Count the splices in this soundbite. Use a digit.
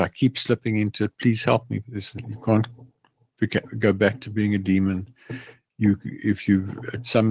1